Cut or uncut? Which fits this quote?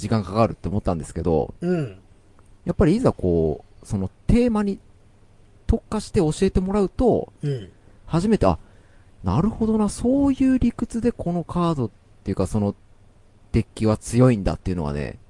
uncut